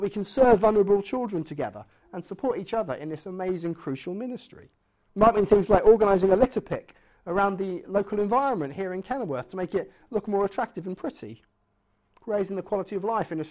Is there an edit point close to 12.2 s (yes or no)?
no